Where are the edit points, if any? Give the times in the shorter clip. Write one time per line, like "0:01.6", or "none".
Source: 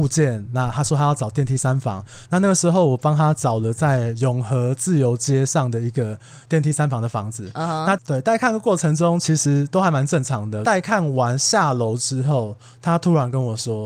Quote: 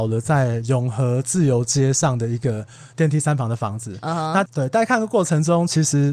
none